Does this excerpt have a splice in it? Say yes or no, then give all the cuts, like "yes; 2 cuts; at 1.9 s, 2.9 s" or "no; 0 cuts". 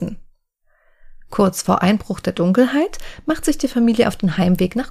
no; 0 cuts